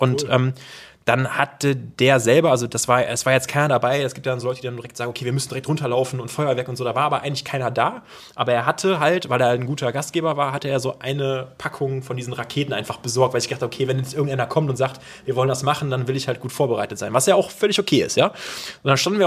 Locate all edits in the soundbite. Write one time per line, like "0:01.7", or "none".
none